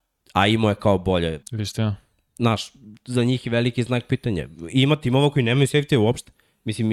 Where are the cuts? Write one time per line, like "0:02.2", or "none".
0:01.4

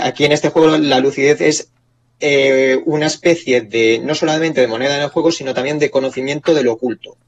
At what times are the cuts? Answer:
none

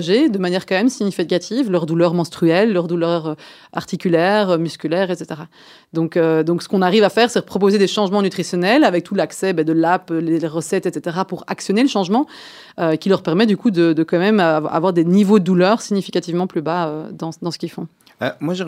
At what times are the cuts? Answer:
none

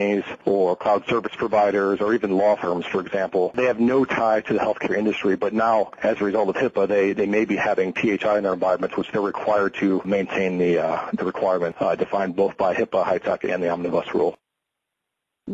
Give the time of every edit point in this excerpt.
none

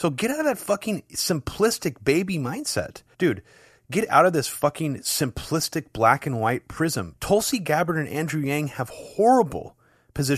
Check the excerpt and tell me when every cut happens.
0:03.1
0:07.1

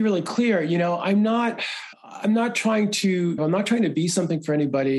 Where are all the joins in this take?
0:01.9
0:03.4

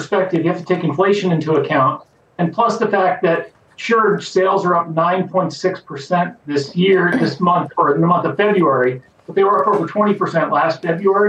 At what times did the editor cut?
none

